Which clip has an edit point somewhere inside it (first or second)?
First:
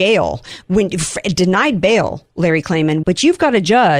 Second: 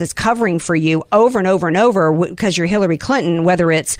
first